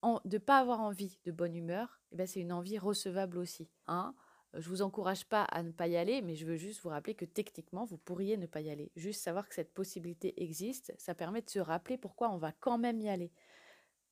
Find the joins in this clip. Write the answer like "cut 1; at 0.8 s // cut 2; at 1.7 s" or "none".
cut 1; at 3.8 s